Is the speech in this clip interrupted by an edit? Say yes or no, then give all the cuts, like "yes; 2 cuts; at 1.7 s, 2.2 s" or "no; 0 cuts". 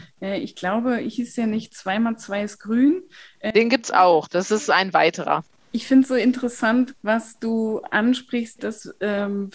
yes; 2 cuts; at 7.0 s, 8.6 s